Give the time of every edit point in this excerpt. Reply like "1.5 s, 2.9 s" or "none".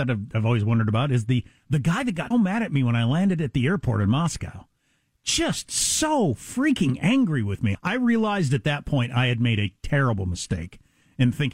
2.3 s, 7.7 s